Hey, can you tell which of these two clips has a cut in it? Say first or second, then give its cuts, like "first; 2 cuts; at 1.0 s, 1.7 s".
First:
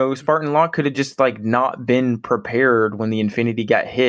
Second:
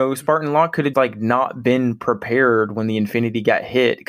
second; 1 cut; at 0.9 s